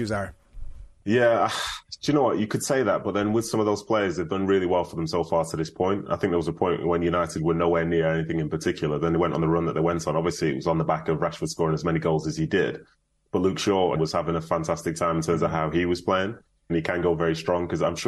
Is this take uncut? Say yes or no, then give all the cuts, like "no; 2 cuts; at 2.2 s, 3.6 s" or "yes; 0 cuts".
no; 2 cuts; at 14.0 s, 16.7 s